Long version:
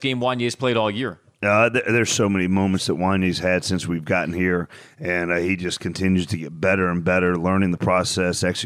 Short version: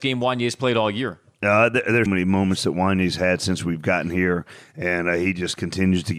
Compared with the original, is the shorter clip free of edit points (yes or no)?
no